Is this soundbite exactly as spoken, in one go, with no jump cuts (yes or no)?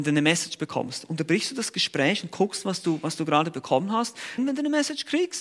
no